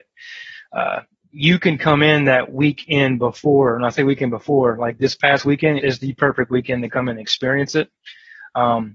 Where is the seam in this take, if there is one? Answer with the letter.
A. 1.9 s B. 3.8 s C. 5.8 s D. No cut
C